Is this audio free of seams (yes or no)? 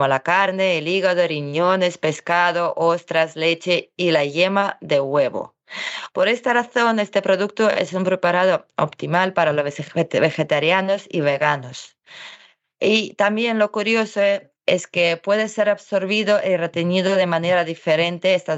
yes